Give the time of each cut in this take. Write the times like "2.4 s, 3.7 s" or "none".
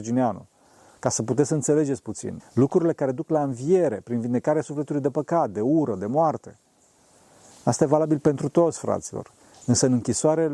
2.4 s